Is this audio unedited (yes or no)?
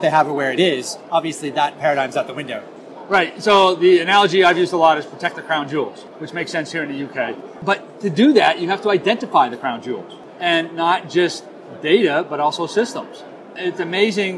yes